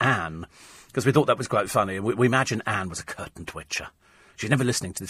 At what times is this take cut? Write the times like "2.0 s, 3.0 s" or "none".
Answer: none